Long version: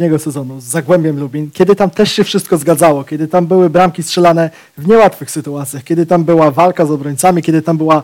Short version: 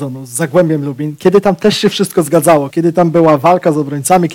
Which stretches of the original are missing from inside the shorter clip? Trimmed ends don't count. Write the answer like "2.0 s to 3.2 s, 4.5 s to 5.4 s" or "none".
3.0 s to 5.8 s